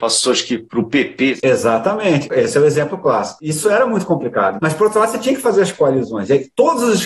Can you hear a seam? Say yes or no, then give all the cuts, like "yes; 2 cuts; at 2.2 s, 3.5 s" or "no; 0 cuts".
no; 0 cuts